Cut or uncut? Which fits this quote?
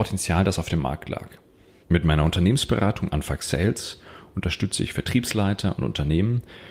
cut